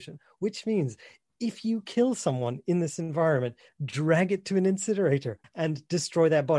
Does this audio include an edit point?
yes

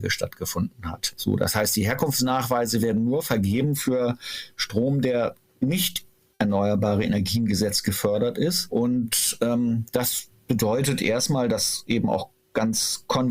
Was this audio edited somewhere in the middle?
no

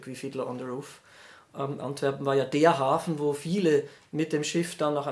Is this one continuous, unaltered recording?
no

